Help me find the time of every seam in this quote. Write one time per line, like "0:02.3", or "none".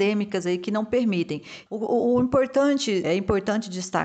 0:01.7
0:03.0